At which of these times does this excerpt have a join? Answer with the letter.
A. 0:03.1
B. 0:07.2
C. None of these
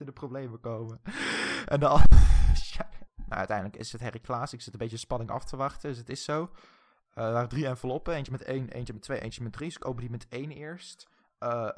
A